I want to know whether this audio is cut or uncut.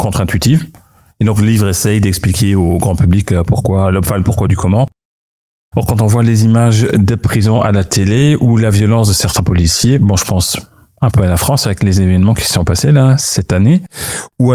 cut